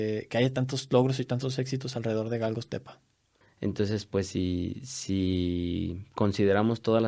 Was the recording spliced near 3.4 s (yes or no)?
yes